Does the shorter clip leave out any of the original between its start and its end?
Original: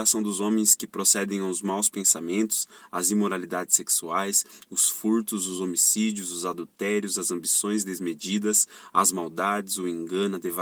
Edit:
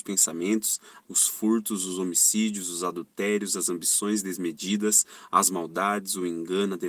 yes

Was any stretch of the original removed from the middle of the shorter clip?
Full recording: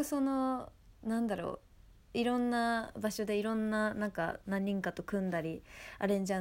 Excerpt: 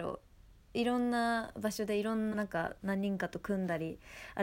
yes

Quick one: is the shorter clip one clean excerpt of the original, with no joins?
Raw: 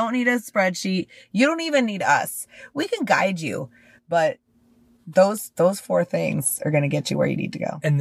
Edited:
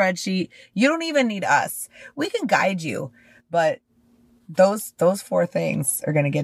yes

